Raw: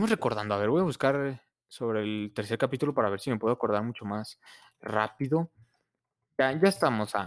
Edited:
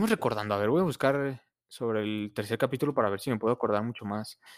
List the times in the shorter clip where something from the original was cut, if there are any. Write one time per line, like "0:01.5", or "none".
none